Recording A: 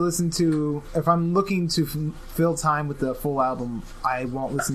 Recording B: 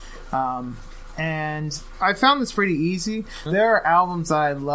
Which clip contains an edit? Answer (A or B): B